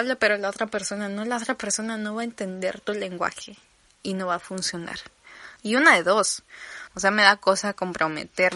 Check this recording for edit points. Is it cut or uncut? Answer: cut